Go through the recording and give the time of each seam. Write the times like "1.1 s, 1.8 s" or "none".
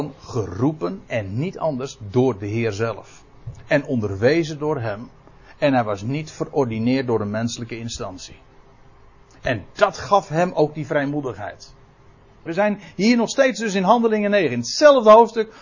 12.5 s